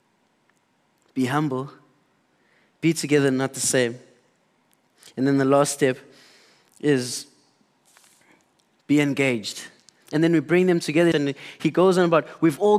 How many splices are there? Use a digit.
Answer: 2